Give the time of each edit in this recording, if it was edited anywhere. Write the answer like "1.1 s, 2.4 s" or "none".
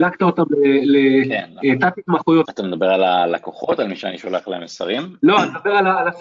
2.4 s